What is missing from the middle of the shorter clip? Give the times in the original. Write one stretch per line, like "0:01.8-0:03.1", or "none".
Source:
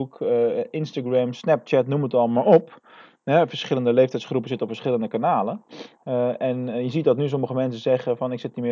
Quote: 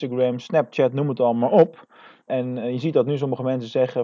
0:03.2-0:06.4